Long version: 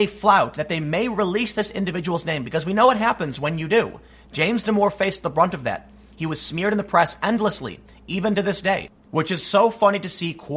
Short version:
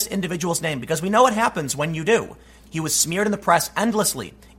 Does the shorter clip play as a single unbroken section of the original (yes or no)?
no